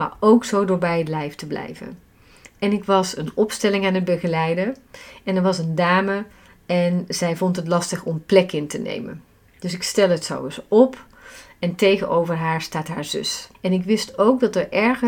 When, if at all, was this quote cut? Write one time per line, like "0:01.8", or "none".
0:13.5